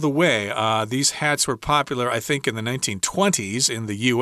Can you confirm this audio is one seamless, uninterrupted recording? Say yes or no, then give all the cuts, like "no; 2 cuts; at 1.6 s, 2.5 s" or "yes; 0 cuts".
yes; 0 cuts